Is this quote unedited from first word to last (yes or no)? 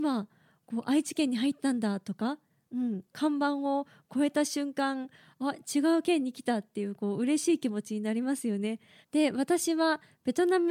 no